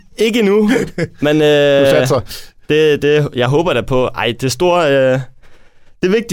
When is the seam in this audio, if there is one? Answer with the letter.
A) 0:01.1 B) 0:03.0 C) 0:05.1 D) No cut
D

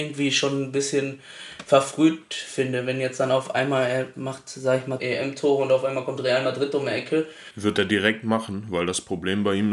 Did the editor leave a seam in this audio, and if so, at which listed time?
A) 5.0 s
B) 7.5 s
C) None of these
A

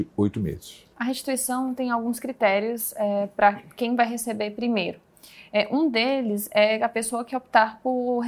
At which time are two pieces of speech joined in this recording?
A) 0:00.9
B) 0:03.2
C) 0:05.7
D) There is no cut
A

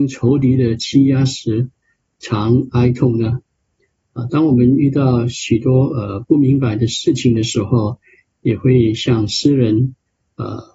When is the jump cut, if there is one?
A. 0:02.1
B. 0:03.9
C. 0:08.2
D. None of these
D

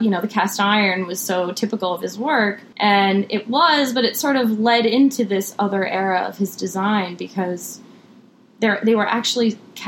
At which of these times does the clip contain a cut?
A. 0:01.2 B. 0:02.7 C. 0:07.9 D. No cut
B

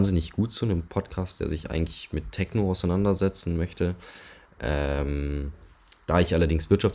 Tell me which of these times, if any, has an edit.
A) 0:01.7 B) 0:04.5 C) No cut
B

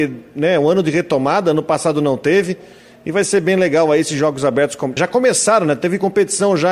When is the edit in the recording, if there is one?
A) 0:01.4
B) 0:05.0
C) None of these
B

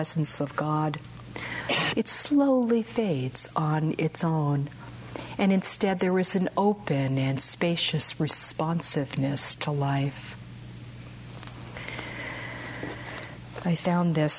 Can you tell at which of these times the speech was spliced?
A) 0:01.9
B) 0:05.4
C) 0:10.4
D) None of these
A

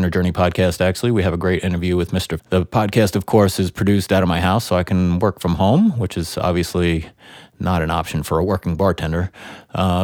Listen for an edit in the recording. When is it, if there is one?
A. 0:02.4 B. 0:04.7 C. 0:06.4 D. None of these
A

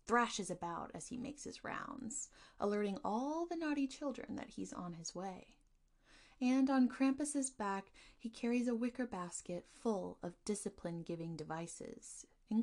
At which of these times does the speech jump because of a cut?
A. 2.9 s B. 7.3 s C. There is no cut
C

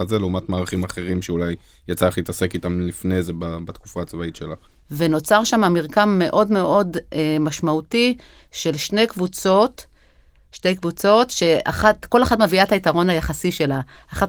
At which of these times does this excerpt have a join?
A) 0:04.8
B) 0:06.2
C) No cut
A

